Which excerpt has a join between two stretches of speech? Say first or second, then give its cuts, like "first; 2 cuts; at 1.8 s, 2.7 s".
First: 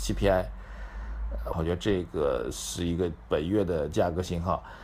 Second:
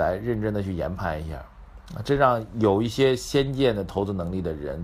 first; 1 cut; at 1.5 s